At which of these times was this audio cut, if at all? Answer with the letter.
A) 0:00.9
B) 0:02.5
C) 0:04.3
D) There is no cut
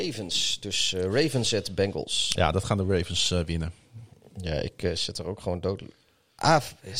D